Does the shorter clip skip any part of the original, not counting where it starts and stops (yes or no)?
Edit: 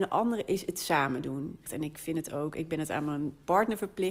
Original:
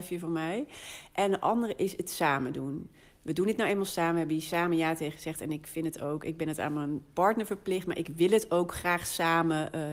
yes